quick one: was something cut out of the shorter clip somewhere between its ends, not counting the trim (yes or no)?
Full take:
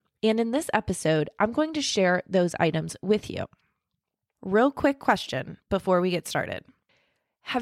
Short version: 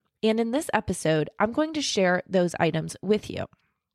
no